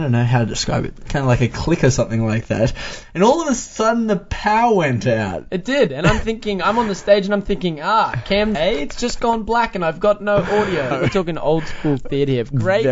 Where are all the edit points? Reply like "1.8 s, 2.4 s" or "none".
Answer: 8.5 s, 10.9 s

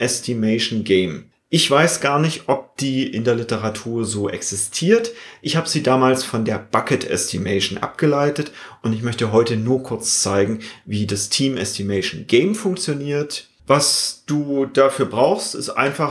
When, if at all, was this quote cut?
13.6 s

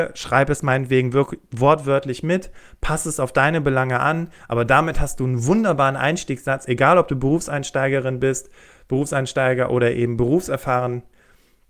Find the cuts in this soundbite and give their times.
none

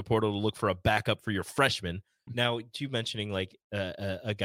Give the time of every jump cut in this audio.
2.3 s

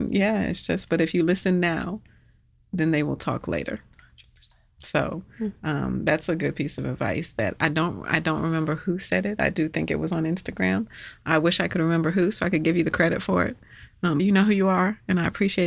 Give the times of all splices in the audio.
14.2 s

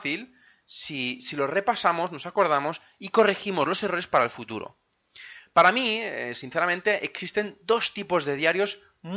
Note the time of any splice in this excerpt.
none

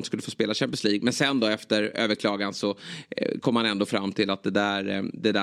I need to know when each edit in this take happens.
none

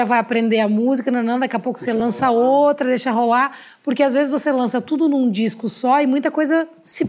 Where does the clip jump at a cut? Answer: none

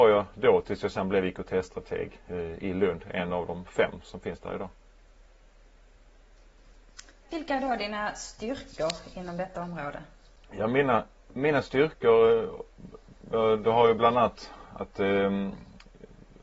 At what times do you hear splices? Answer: none

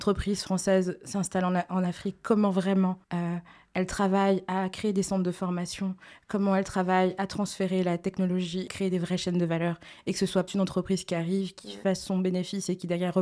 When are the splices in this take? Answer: 3.0 s, 8.7 s, 10.5 s

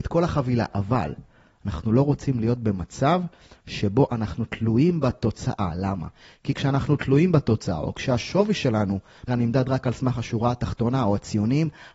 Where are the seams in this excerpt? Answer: 9.3 s

